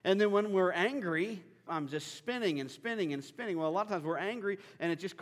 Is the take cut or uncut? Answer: cut